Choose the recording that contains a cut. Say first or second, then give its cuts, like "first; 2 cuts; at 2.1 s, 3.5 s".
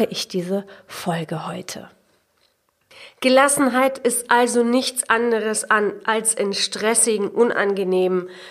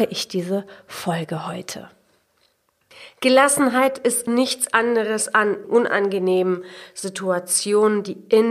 second; 2 cuts; at 4.3 s, 5.6 s